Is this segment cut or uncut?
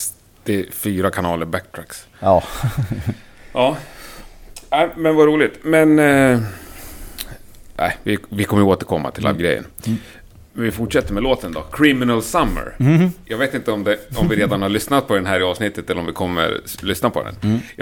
uncut